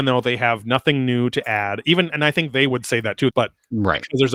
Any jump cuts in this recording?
yes; 1 cut; at 3.3 s

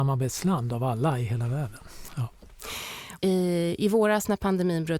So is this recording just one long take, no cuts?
no; 2 cuts; at 2.1 s, 3.2 s

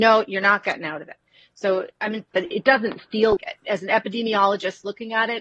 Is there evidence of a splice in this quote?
yes; 2 cuts; at 2.3 s, 3.4 s

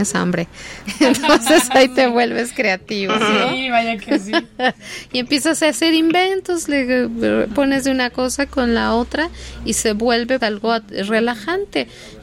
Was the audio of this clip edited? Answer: yes; 1 cut; at 10.4 s

